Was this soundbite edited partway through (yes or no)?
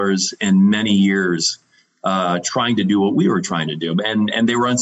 no